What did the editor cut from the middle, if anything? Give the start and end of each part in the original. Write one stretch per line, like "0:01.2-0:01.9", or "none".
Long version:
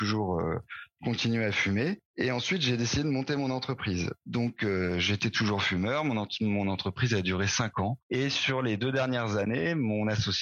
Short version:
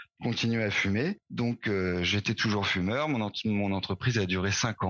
0:02.0-0:04.2